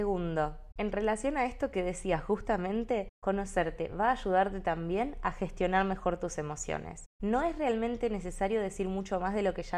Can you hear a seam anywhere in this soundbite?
no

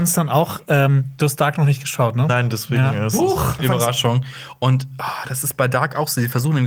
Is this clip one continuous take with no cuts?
no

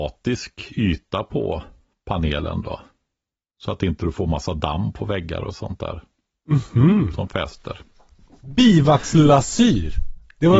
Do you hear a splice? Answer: no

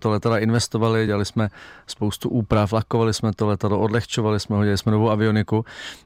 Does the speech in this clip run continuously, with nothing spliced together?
yes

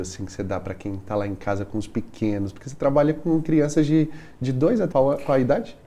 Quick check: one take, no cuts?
no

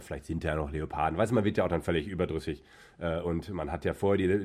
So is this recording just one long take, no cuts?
yes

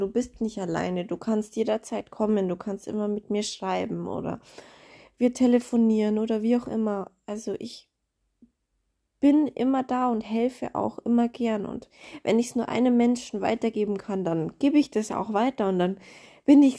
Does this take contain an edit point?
no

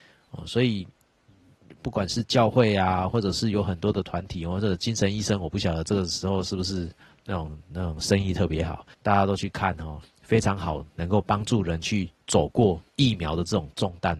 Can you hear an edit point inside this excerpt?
yes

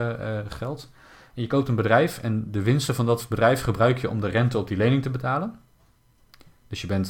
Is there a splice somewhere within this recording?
no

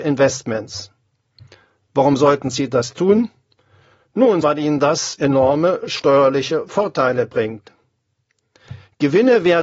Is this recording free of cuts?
no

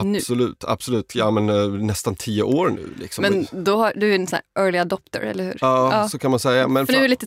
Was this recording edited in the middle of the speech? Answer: no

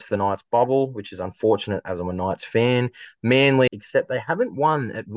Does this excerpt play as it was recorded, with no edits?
no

